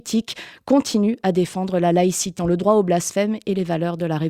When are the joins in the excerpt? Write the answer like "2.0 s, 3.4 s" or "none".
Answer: 2.4 s